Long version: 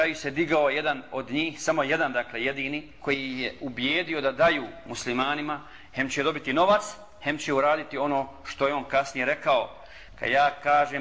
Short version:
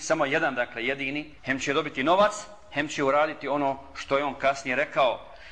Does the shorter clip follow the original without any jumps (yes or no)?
no